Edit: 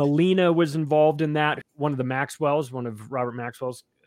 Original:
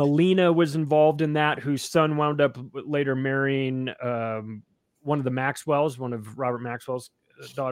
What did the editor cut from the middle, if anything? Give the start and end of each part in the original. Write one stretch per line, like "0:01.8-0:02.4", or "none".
0:01.6-0:04.9